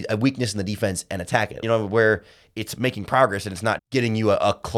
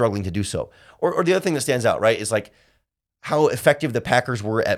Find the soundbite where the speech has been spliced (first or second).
first